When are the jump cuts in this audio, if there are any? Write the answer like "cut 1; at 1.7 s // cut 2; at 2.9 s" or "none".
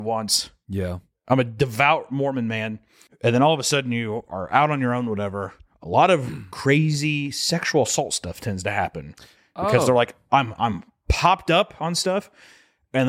cut 1; at 3.1 s